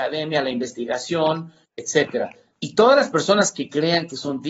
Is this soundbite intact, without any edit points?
no; 1 cut; at 2.5 s

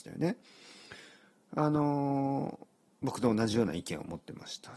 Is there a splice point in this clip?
no; 0 cuts

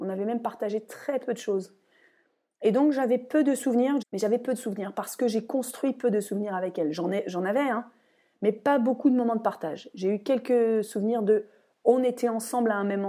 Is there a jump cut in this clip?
yes; 1 cut; at 4.0 s

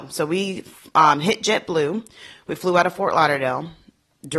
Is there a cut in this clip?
no; 0 cuts

